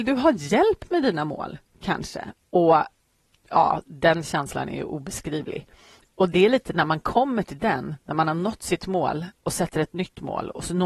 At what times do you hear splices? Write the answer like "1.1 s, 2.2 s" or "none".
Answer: 2.4 s